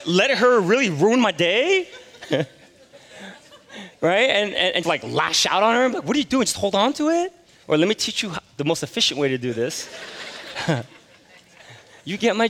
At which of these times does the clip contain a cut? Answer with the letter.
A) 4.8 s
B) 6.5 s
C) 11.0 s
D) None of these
A